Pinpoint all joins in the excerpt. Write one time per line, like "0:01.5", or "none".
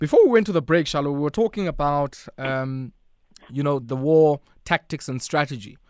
0:03.8